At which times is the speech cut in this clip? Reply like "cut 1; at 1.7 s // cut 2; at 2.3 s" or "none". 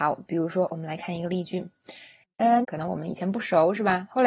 cut 1; at 2.6 s